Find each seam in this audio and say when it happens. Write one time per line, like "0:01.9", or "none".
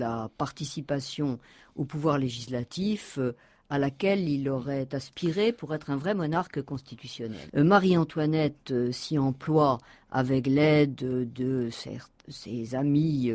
0:07.5